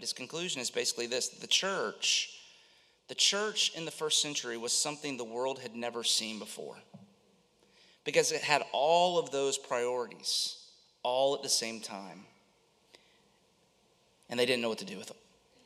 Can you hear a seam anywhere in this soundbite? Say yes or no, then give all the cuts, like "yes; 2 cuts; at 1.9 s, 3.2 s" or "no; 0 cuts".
no; 0 cuts